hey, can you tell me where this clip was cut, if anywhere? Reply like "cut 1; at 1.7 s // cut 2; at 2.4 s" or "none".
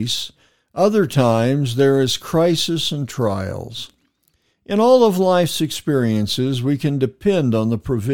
none